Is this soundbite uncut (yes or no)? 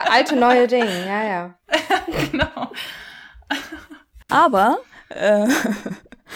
no